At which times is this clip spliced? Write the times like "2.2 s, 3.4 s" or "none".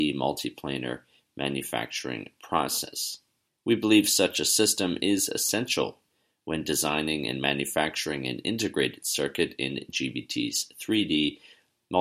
3.5 s